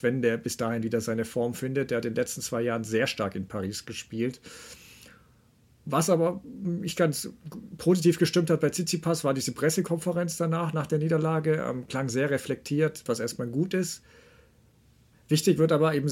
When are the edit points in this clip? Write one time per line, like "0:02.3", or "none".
0:13.1